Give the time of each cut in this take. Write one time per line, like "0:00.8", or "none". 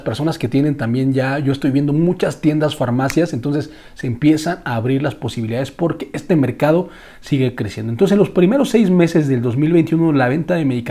none

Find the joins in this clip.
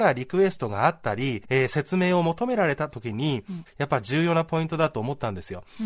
0:01.4
0:03.7

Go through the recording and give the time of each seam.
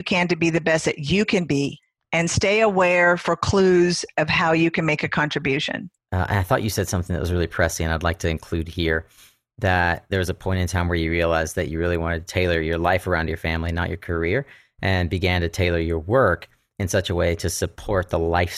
0:06.0

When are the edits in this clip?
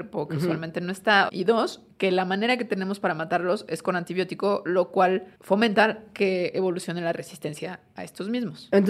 0:01.3
0:05.3

